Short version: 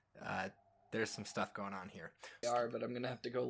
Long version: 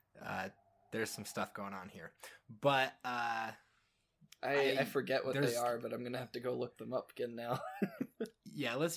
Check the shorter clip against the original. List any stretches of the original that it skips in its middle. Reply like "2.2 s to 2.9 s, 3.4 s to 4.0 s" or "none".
2.4 s to 5.5 s